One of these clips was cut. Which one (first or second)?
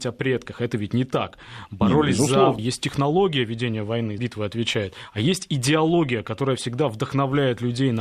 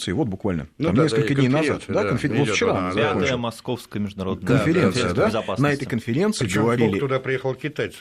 first